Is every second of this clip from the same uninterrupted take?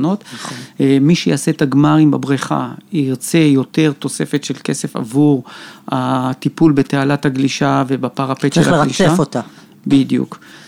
yes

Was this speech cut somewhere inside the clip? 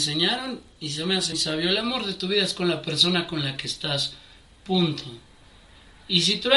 yes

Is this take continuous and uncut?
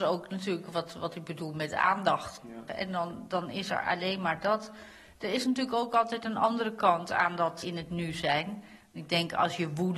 no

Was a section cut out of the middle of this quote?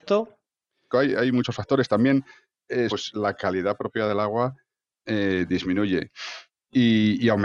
yes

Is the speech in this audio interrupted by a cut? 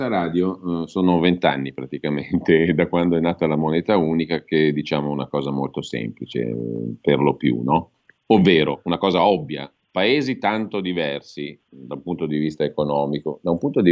no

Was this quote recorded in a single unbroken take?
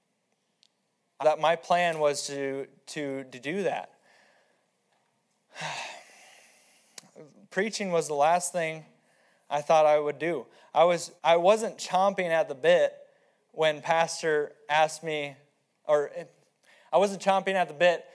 no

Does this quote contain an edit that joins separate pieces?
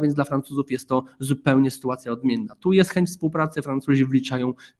no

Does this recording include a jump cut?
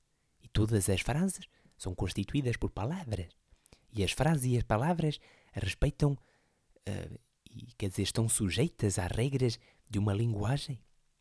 no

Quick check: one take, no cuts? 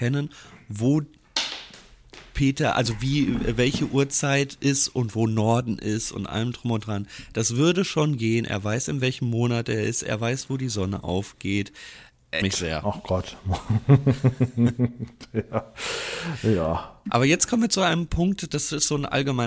no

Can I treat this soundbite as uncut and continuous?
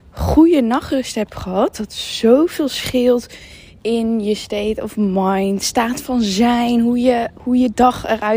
no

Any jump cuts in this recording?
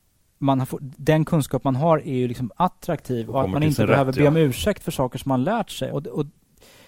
yes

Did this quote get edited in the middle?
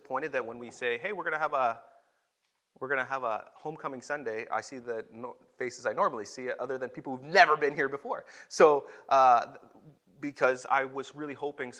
no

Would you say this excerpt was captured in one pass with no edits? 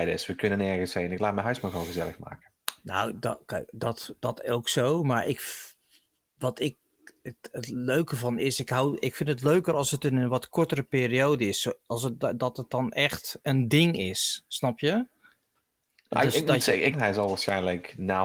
no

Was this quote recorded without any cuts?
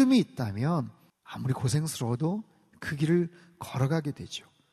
no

